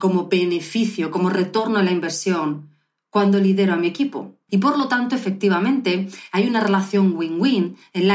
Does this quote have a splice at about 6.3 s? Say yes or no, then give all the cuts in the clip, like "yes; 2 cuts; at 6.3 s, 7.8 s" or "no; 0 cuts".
no; 1 cut; at 4.5 s